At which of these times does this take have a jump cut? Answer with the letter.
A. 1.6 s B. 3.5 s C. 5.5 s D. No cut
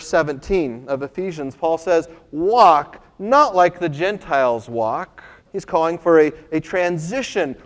C